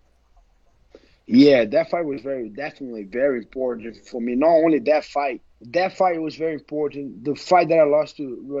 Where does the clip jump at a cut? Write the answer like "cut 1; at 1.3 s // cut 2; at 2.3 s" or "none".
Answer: cut 1; at 5.5 s